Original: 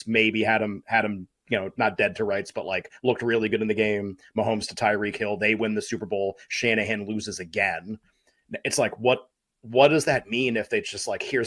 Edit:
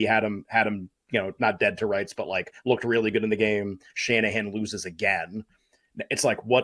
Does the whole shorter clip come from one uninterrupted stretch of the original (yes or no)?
no